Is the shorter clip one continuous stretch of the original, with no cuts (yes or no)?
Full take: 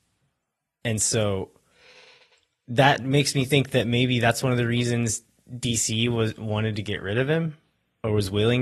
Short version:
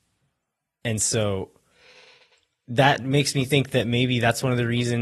yes